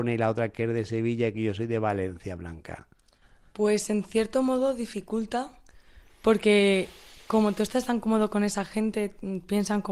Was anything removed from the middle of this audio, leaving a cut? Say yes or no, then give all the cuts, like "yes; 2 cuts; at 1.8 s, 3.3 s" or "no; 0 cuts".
no; 0 cuts